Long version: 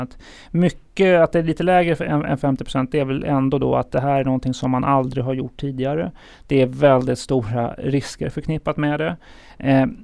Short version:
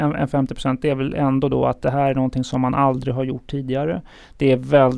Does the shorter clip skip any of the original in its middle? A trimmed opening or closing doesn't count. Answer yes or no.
no